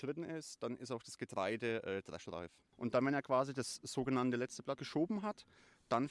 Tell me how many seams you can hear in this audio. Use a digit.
2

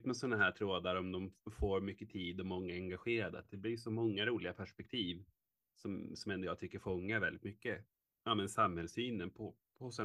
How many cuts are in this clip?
0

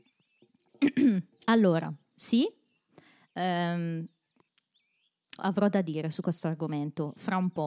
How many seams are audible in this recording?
1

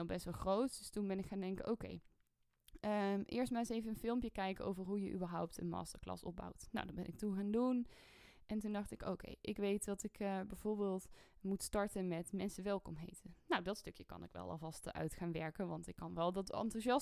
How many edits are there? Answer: 0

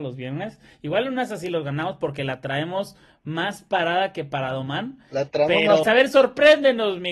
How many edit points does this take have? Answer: 1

